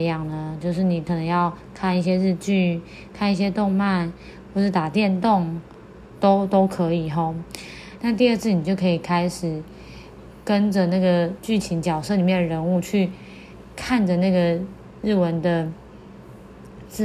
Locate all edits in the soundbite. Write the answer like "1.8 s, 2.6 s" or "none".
8.0 s, 11.4 s